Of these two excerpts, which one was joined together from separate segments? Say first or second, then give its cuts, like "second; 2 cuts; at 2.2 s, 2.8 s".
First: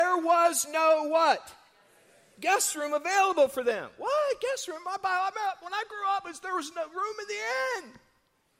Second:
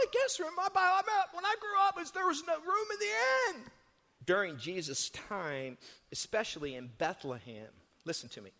second; 1 cut; at 4.2 s